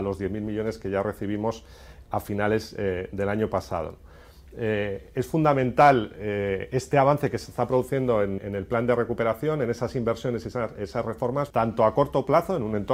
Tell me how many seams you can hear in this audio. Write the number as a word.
two